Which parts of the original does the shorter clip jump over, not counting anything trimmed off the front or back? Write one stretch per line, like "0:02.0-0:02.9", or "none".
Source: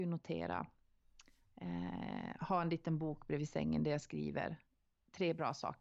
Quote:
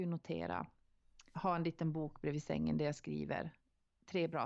0:01.3-0:02.4